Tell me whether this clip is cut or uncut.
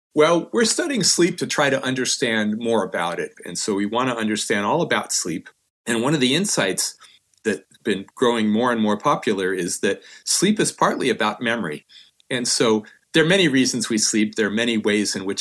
cut